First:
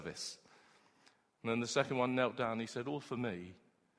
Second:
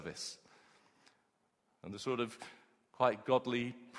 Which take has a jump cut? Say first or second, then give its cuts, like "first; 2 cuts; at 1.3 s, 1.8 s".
first; 1 cut; at 1.3 s